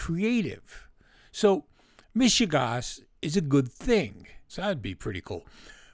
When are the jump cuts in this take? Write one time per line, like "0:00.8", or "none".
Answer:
0:04.5